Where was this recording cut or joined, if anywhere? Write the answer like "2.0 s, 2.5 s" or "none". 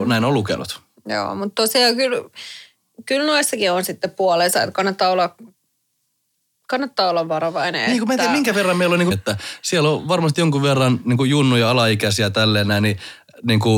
9.1 s